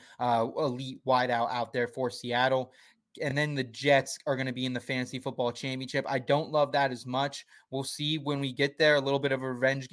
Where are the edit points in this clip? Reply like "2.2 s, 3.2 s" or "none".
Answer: none